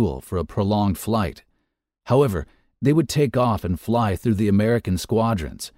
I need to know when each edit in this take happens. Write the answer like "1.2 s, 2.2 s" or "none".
none